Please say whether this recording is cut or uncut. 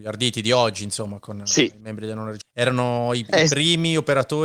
cut